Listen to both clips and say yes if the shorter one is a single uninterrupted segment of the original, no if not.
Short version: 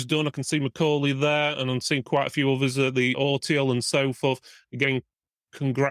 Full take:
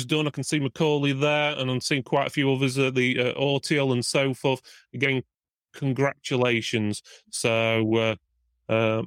no